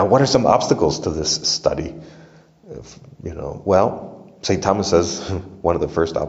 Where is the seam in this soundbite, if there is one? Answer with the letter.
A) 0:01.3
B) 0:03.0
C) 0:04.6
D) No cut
D